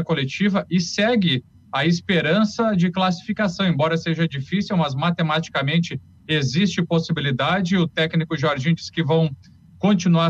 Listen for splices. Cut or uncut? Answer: uncut